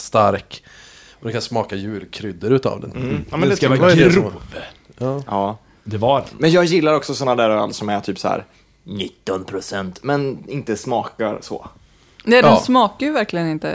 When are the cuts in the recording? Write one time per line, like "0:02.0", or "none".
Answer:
none